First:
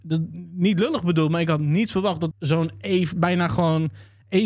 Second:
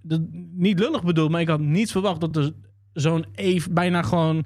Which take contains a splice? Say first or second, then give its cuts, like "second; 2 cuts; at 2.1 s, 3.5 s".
first; 1 cut; at 2.3 s